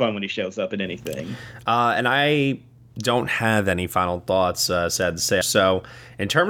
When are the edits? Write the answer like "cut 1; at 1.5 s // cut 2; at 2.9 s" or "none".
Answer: cut 1; at 5.4 s

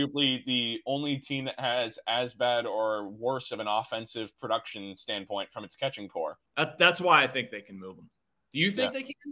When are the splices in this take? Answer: cut 1; at 6.5 s

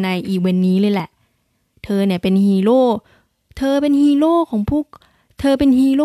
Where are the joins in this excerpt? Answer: none

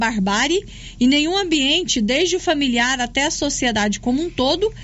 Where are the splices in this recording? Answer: none

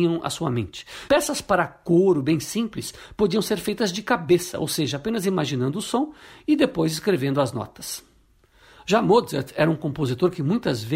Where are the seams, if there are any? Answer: cut 1; at 1.1 s

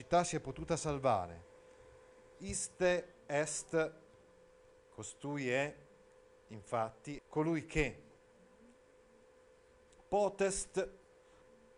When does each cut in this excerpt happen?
cut 1; at 7.2 s

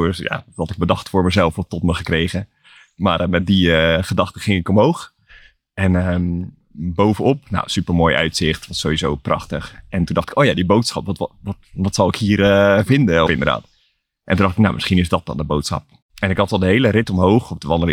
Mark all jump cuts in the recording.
cut 1; at 13.3 s // cut 2; at 16.0 s

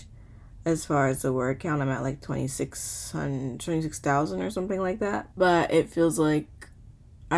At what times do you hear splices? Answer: cut 1; at 5.3 s

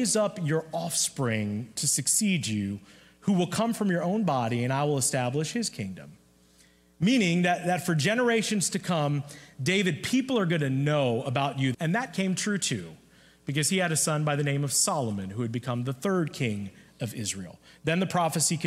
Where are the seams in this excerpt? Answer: cut 1; at 11.7 s

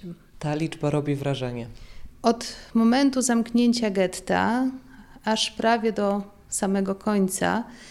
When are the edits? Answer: cut 1; at 2.1 s

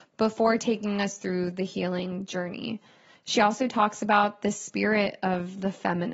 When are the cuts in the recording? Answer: none

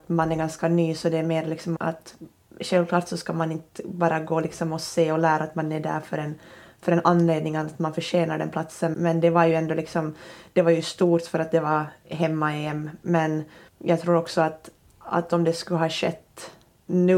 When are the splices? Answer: cut 1; at 1.8 s // cut 2; at 8.9 s

